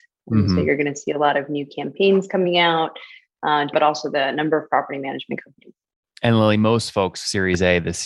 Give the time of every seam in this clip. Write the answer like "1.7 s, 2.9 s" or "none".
3.7 s